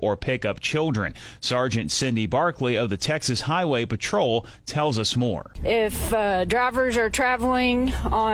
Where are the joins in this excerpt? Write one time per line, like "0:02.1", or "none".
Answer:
none